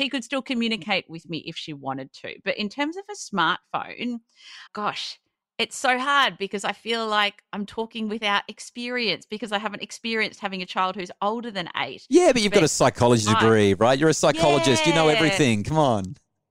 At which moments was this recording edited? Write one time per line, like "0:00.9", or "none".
0:04.7